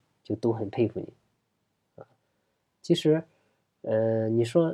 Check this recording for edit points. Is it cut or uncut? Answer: uncut